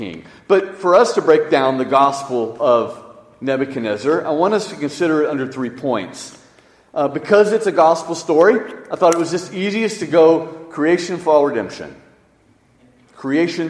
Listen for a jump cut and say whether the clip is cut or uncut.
uncut